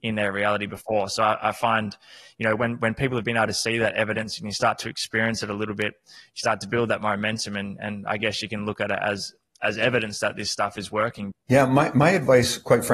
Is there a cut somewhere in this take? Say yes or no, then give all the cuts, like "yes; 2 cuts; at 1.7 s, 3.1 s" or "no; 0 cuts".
yes; 1 cut; at 11.3 s